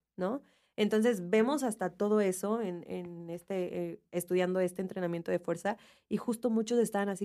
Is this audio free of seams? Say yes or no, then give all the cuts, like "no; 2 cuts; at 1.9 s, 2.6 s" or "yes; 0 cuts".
yes; 0 cuts